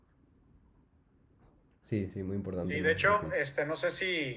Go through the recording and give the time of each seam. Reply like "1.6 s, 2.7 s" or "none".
none